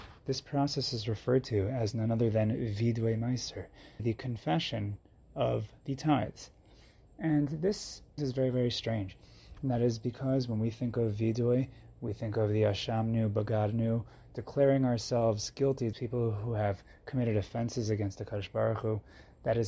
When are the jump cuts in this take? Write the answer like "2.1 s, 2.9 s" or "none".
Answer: 4.0 s, 8.2 s, 15.9 s